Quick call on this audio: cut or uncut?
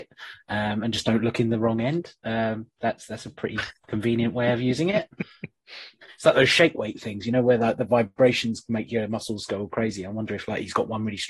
uncut